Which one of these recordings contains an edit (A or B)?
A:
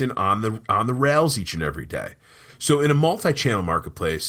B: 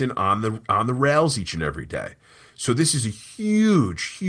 A